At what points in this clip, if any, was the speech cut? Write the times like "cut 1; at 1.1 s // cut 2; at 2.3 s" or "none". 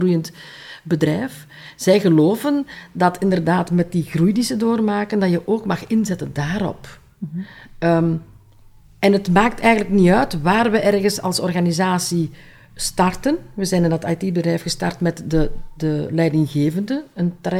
none